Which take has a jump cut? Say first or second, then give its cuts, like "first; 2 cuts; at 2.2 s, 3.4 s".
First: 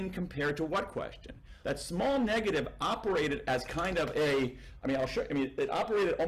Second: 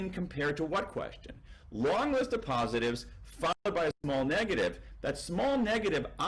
first; 1 cut; at 1.6 s